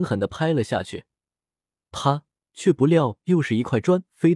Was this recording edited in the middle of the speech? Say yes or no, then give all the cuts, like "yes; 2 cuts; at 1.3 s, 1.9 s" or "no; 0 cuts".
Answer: yes; 1 cut; at 2.5 s